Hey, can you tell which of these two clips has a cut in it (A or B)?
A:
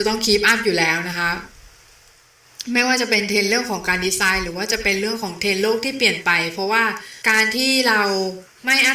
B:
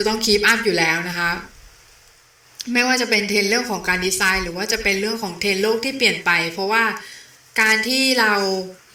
A